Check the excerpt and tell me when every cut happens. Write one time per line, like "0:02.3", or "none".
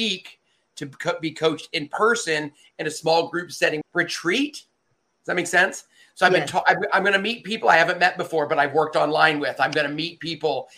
0:03.8